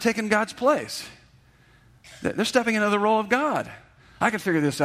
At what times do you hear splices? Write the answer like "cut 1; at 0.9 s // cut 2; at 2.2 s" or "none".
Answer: none